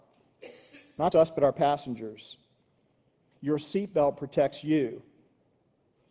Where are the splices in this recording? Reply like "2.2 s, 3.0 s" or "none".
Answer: 1.1 s, 3.3 s